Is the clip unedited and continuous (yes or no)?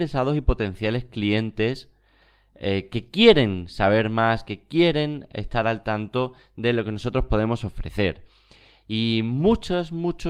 yes